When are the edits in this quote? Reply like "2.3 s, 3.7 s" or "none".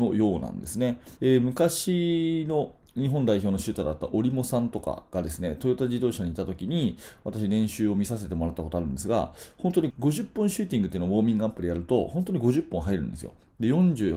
1.2 s, 9.9 s